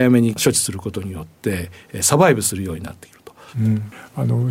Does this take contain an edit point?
yes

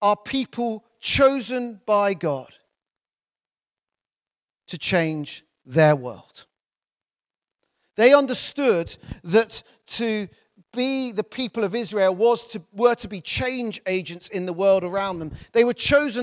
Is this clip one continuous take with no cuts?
yes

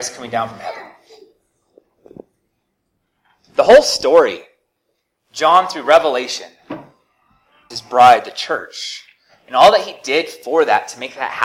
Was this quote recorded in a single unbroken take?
no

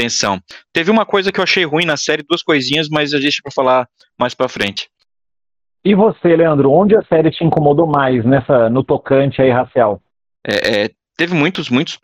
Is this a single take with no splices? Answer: no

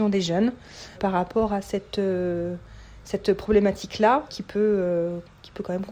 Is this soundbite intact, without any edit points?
no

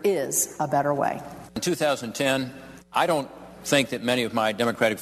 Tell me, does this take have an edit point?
yes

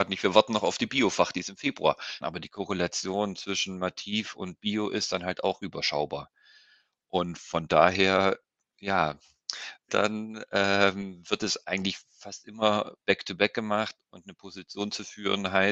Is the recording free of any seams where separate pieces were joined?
no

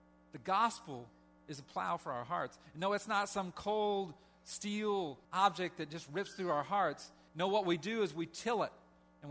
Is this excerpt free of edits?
no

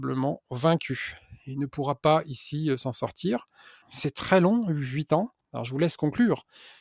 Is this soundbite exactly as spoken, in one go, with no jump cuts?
no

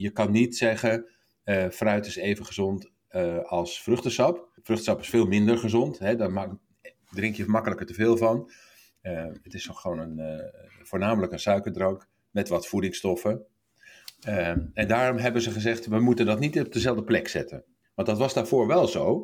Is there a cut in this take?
yes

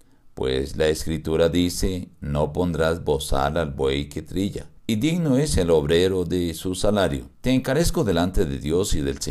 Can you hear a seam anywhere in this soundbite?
yes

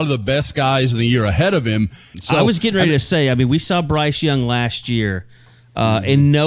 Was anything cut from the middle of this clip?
yes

